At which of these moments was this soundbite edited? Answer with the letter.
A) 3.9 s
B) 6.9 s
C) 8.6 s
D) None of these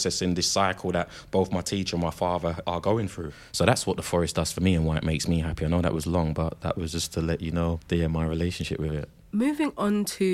D